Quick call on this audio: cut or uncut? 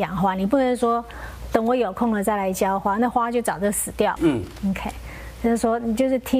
cut